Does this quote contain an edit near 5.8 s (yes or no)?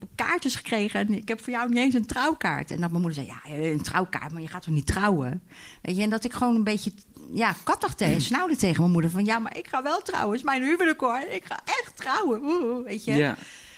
no